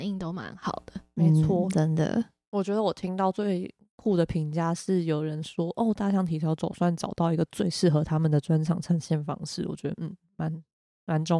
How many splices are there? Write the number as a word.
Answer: zero